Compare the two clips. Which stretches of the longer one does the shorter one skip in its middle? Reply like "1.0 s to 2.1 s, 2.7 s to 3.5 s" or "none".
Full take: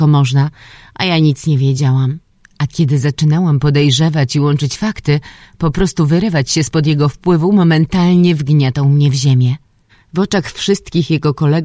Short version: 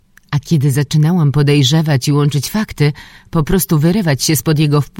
none